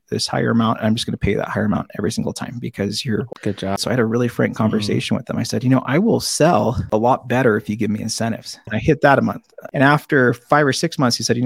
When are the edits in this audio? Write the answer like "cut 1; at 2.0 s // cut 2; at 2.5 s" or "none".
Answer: cut 1; at 3.8 s // cut 2; at 8.7 s